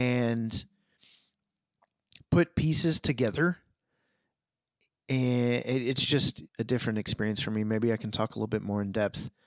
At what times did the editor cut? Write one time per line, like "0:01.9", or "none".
0:06.5